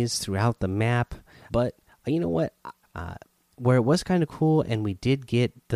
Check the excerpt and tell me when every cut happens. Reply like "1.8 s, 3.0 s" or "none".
1.5 s, 2.8 s